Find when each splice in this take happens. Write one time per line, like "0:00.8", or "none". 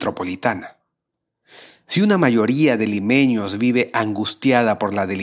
none